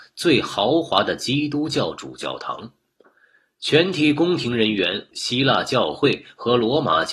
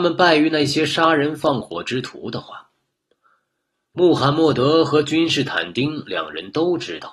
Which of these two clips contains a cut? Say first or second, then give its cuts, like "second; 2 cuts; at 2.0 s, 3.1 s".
first; 1 cut; at 5.1 s